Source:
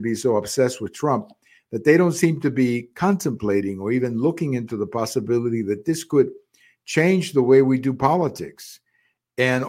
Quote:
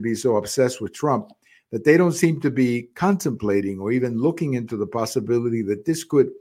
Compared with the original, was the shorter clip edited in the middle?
no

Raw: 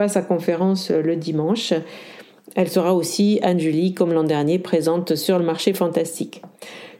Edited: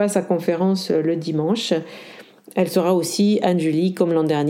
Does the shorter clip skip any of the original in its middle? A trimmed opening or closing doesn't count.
no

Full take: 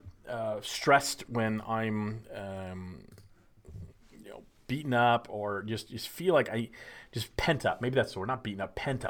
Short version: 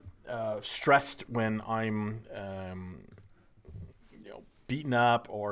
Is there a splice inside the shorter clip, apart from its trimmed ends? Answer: no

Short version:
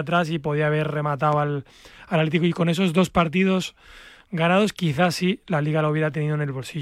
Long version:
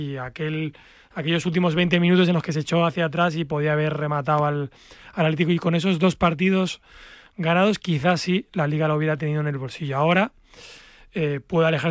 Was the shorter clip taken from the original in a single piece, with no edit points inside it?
yes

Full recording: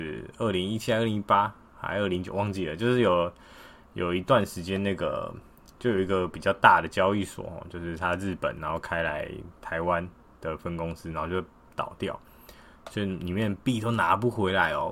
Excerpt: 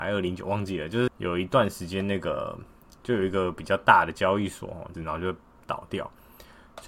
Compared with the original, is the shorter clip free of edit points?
no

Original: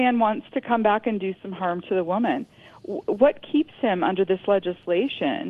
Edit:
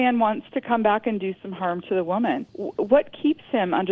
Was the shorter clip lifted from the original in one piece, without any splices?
no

